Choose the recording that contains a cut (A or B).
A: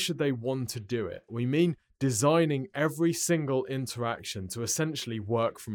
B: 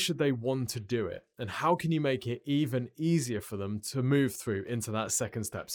A